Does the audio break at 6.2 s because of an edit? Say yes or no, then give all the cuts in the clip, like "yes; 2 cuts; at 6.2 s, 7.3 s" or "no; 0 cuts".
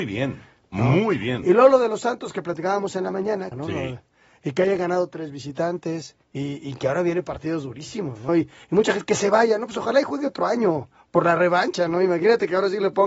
yes; 3 cuts; at 3.5 s, 6.2 s, 8.3 s